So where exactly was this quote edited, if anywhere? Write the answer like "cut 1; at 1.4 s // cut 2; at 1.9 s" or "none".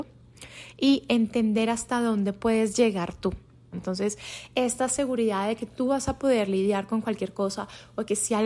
cut 1; at 3.7 s